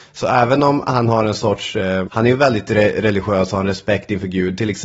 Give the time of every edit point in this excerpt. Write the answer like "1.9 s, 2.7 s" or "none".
2.0 s